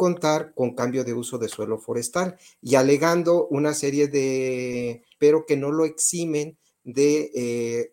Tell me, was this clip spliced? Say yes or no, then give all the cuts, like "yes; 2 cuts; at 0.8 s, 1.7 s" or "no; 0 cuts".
yes; 1 cut; at 5.2 s